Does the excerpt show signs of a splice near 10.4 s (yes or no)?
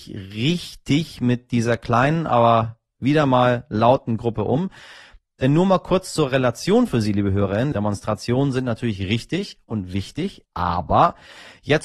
yes